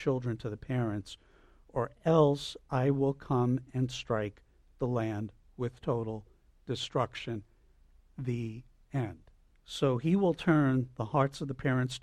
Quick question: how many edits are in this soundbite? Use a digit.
1